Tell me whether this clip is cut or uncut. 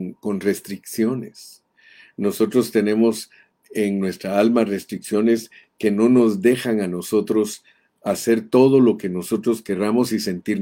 uncut